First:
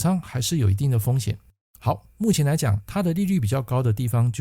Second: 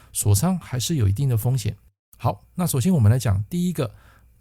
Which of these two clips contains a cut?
first; 1 cut; at 2.1 s

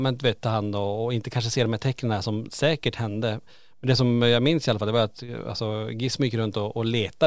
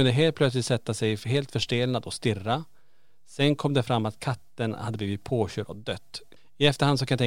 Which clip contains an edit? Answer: second; 1 cut; at 6.4 s

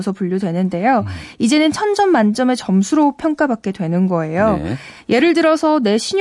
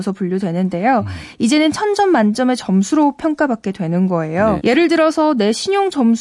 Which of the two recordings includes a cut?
second; 1 cut; at 4.6 s

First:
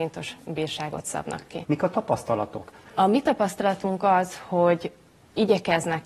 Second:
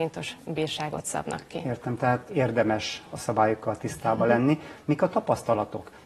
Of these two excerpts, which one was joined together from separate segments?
first; 2 cuts; at 1.6 s, 2.9 s

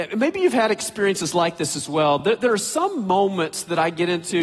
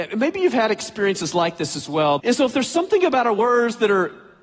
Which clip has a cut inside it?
second; 1 cut; at 2.2 s

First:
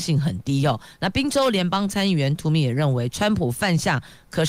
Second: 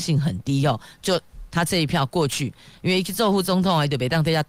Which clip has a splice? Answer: first; 1 cut; at 1.0 s

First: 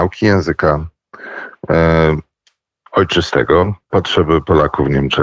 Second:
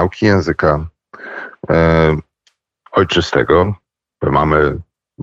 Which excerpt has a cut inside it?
first; 1 cut; at 3.9 s

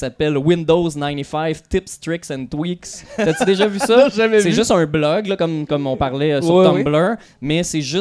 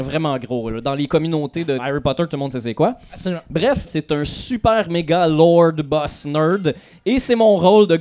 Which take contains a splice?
second; 1 cut; at 3.9 s

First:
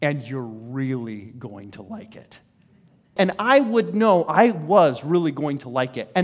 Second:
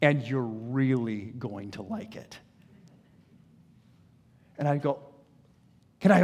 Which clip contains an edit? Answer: first; 1 cut; at 3.2 s

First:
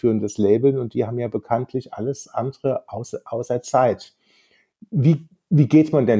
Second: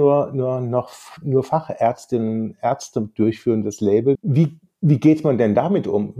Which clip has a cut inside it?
second; 1 cut; at 4.2 s

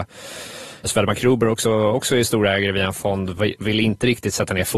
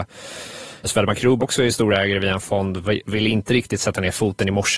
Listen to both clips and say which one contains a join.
second; 1 cut; at 1.4 s

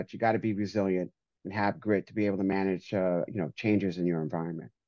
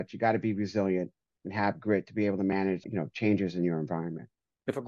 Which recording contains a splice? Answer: second; 1 cut; at 2.8 s

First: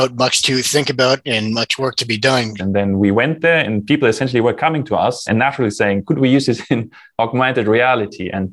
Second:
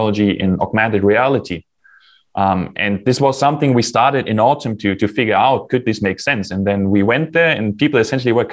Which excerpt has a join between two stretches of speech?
first; 2 cuts; at 2.6 s, 5.3 s

